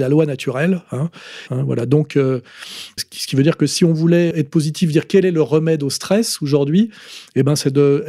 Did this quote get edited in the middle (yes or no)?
yes